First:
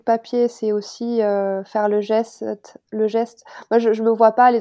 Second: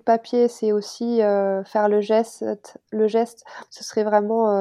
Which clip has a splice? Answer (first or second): second